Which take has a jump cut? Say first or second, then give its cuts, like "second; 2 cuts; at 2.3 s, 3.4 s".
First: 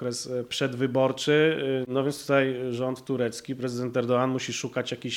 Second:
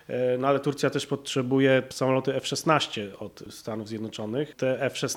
first; 1 cut; at 1.8 s